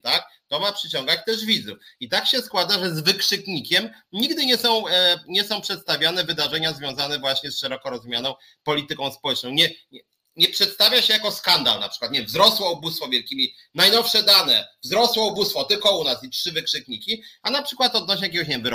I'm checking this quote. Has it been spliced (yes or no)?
no